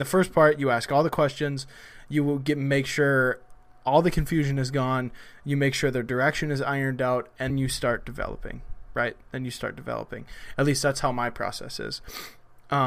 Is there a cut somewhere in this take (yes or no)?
yes